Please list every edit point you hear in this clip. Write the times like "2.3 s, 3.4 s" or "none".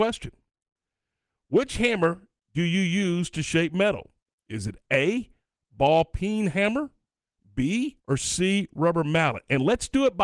8.0 s